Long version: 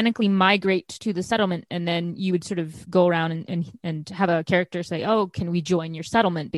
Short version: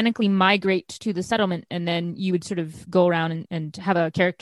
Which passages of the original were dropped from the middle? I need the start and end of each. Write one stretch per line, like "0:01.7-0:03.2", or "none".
0:03.5-0:03.8